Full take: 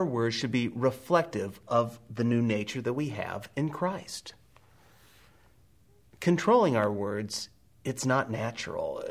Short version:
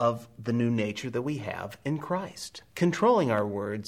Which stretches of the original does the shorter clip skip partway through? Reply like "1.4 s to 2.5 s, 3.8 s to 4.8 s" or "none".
4.4 s to 6.2 s

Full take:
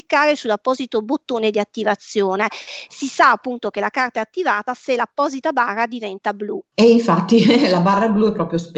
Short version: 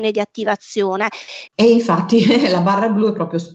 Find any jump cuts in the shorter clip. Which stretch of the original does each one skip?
2.9 s to 6.7 s

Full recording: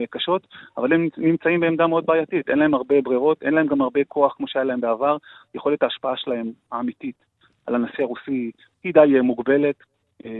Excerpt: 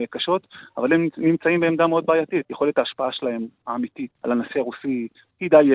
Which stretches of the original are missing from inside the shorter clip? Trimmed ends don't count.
2.4 s to 5.5 s, 7.2 s to 7.6 s

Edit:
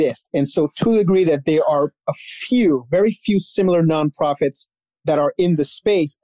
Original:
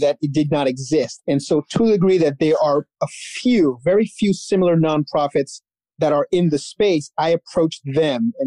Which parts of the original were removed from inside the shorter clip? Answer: none

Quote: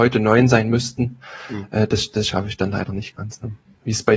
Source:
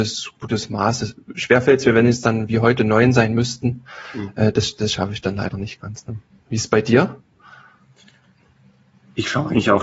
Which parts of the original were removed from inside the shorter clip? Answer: none

